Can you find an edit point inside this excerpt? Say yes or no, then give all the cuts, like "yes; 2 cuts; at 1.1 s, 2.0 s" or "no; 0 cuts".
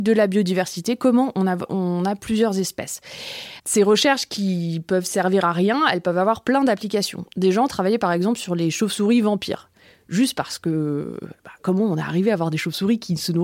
no; 0 cuts